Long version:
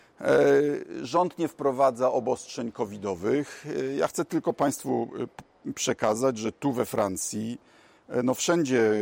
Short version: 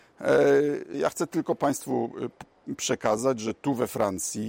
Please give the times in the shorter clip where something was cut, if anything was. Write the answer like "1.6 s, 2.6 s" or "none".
0.9 s